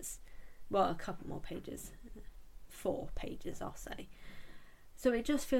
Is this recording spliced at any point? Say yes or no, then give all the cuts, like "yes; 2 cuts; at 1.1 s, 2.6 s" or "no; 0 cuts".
no; 0 cuts